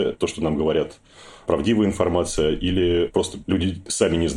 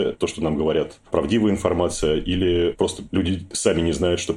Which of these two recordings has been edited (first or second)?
second